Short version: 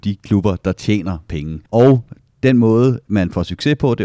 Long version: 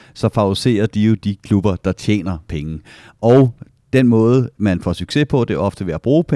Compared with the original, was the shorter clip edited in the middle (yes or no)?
yes